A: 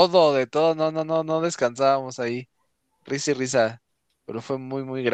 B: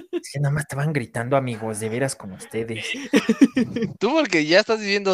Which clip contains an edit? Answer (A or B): B